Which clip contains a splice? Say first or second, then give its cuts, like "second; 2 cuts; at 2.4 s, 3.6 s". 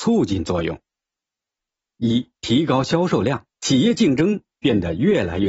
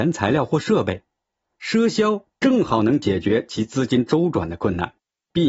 first; 2 cuts; at 2.4 s, 3.5 s